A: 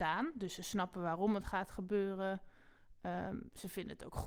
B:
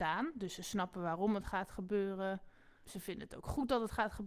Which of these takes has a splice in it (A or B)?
B